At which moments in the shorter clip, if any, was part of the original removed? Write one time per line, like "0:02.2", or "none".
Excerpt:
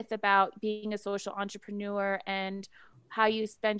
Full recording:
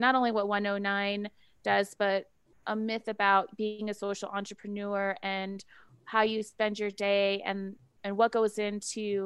none